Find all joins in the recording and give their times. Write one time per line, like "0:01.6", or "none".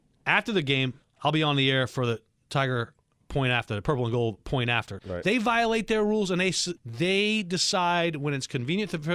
0:01.0
0:05.0
0:06.8